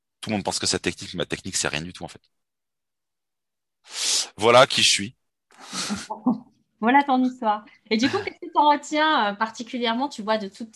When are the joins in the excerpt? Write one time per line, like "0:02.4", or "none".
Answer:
none